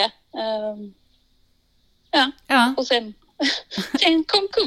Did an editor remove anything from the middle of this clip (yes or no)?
no